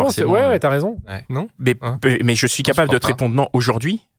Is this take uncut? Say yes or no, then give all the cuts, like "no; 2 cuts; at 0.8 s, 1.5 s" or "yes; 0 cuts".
no; 1 cut; at 1.2 s